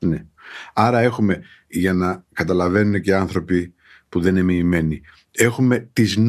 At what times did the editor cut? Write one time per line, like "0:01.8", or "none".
none